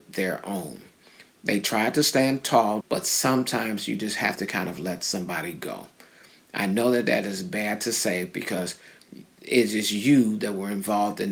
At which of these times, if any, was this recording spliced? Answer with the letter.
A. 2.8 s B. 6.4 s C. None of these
A